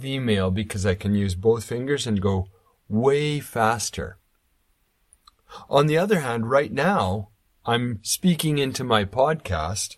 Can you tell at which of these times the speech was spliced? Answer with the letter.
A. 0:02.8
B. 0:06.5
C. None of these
C